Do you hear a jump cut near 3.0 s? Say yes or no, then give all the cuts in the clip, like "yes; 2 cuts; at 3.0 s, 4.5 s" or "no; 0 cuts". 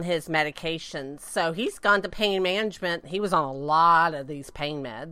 yes; 1 cut; at 3.0 s